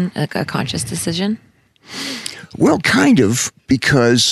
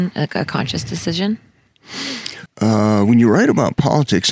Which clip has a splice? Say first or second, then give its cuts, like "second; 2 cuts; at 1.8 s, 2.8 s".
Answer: second; 1 cut; at 2.5 s